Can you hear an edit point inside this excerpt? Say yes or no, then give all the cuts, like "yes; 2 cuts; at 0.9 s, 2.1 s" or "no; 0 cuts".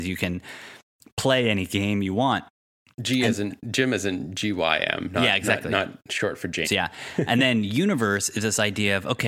yes; 1 cut; at 6.6 s